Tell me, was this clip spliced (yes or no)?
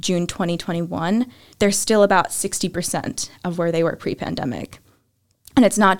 yes